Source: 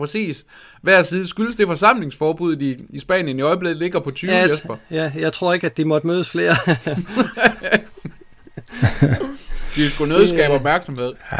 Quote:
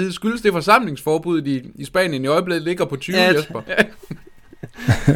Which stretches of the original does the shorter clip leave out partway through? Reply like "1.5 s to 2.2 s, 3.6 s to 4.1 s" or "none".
4.8 s to 7.6 s

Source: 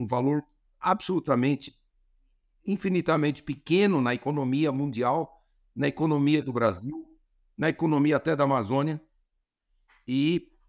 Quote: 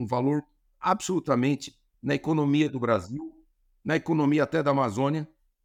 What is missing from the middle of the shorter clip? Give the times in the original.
1.9 s to 5.7 s

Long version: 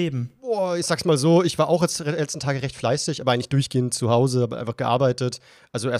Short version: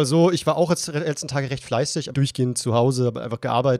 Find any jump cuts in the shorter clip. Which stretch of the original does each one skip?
3.2 s to 3.5 s

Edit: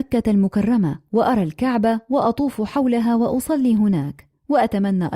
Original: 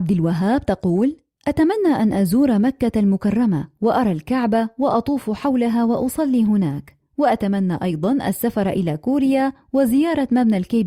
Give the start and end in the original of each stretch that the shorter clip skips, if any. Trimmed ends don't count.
none

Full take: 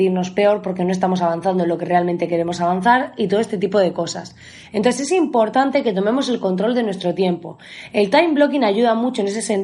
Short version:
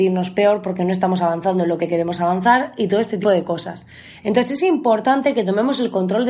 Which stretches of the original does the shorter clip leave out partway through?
1.8 s to 2.2 s, 3.6 s to 3.7 s

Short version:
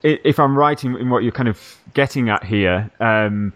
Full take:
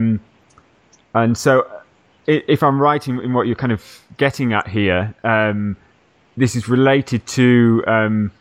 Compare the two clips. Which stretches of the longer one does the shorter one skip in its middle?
none

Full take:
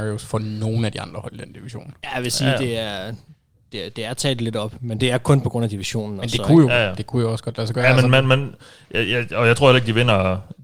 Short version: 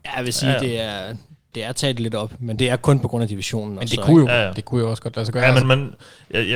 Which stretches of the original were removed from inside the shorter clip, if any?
3.5 s to 3.9 s, 8.0 s to 8.2 s

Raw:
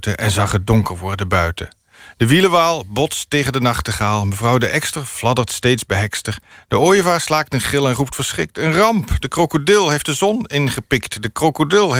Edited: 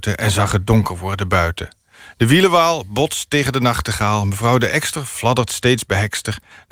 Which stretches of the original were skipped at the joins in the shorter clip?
none

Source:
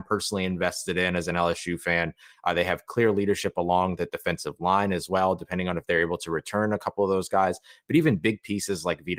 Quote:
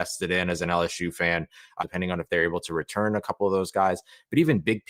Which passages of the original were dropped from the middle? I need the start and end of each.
2.5 s to 5.4 s

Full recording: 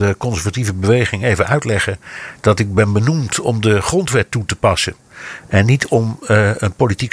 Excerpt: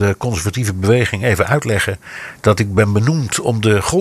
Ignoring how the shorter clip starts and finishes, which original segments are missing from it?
none

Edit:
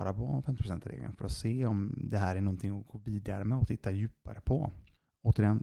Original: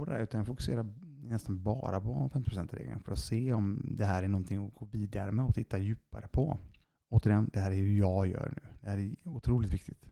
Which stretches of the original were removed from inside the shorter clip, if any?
none

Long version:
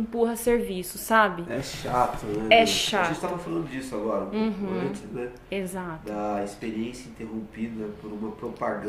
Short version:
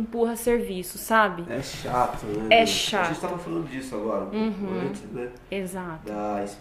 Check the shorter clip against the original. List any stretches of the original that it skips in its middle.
none

